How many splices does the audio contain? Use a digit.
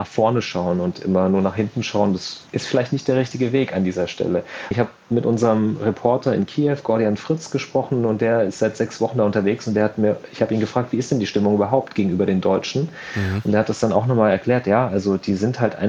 1